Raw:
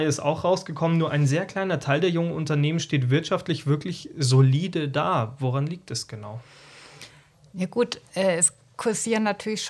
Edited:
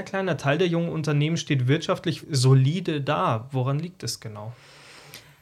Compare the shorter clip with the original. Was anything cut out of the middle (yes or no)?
yes